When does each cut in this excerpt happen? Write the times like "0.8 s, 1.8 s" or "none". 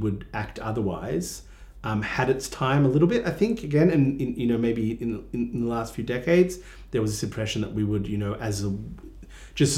none